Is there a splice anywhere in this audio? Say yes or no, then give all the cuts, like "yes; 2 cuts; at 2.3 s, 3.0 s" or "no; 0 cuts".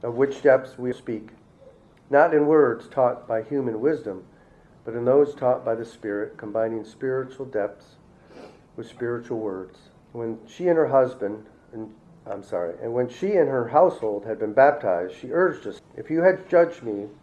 yes; 3 cuts; at 0.9 s, 10.0 s, 15.8 s